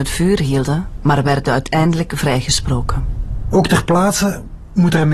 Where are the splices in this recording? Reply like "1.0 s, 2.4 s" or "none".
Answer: 1.0 s